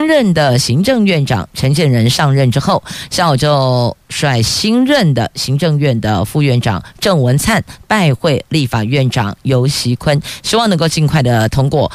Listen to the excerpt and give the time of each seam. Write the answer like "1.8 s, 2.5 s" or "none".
none